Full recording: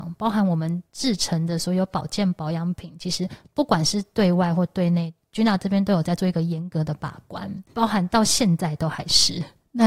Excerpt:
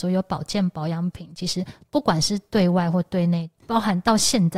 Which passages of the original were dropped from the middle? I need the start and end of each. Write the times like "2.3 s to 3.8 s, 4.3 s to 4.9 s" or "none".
5.2 s to 7.6 s